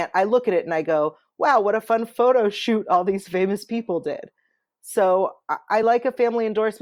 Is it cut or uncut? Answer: uncut